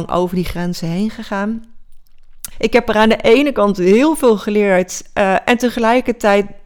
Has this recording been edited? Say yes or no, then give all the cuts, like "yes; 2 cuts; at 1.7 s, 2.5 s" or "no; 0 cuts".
yes; 1 cut; at 2.5 s